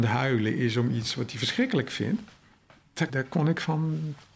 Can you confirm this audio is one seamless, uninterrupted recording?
no; 1 cut; at 3.1 s

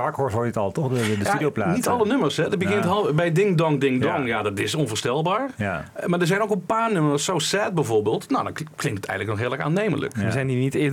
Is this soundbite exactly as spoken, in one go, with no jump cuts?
yes; 0 cuts

